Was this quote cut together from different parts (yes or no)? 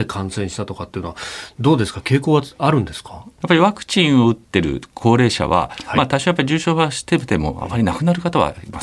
no